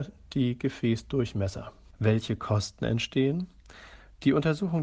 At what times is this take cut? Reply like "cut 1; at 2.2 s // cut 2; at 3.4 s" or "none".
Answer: cut 1; at 1.9 s